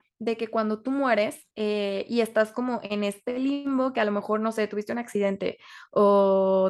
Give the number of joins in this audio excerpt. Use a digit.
1